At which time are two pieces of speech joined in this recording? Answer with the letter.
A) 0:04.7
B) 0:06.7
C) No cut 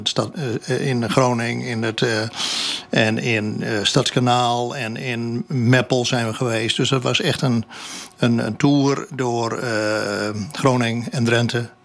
C